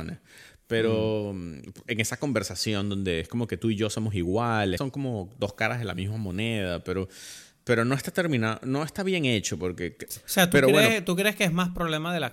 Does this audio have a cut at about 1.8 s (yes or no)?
no